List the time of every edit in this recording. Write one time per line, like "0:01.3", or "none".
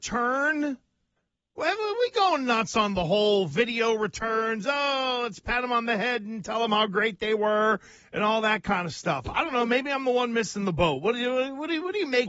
none